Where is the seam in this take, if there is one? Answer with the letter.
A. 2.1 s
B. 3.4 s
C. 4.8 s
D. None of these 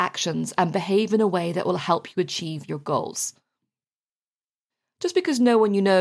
D